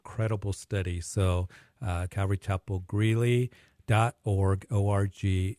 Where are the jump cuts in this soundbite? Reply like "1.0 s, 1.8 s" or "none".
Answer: 2.1 s